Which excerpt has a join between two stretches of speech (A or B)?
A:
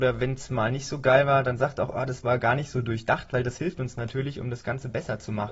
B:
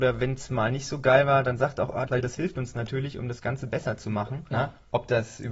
B